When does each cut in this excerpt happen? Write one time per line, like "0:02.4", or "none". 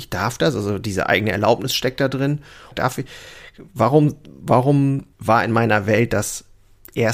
0:02.7
0:05.1